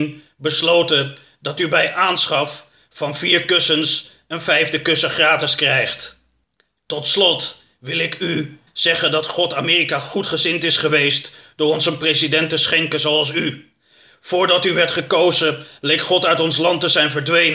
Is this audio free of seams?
no; 1 cut; at 8.7 s

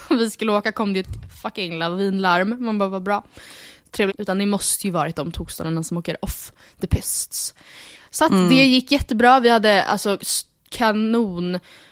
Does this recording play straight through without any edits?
no; 1 cut; at 4.1 s

